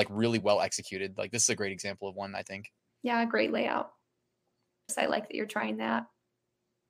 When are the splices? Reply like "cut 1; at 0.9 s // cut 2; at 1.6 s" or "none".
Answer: cut 1; at 4.9 s